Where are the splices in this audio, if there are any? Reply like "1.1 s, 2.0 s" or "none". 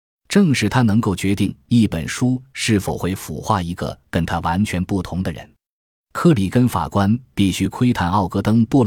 none